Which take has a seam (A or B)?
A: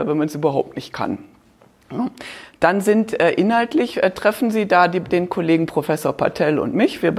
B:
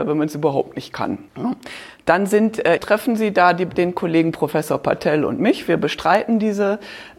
B